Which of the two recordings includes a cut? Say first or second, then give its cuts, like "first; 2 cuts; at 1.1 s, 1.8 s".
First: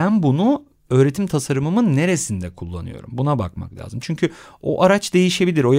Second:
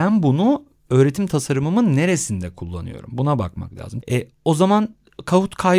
second; 1 cut; at 4.0 s